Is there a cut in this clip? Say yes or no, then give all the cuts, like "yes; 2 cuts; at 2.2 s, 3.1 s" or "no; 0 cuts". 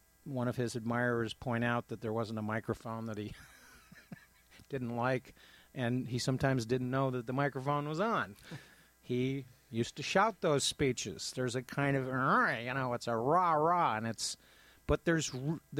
no; 0 cuts